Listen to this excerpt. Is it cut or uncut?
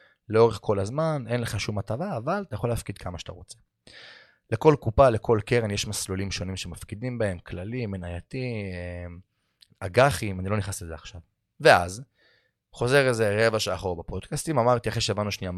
uncut